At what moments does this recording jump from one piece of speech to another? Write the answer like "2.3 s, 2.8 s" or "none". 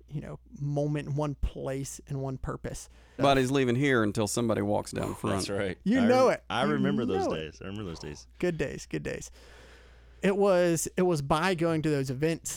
3.2 s, 10.2 s